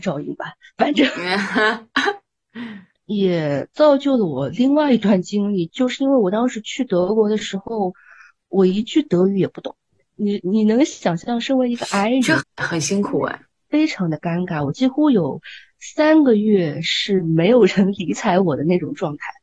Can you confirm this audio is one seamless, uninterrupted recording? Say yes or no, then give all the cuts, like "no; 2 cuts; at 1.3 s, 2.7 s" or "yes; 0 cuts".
no; 1 cut; at 12.4 s